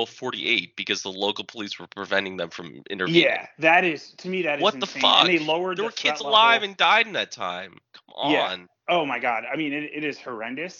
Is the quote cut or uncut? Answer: uncut